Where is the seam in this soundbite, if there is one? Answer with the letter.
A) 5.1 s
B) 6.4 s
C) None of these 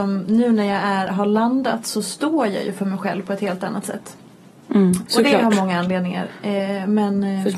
A